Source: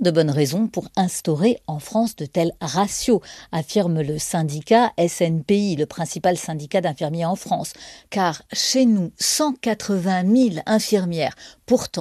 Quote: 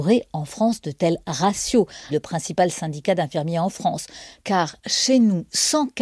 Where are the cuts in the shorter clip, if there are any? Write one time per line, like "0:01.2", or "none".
0:02.1